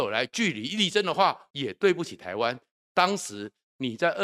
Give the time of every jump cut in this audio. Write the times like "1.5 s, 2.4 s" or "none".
1.5 s